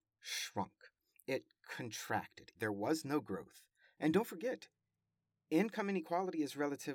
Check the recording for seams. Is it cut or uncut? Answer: cut